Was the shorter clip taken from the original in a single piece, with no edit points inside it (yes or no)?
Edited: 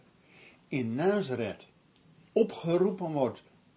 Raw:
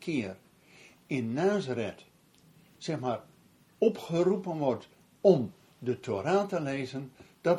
no